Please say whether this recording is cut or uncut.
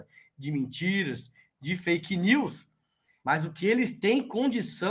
cut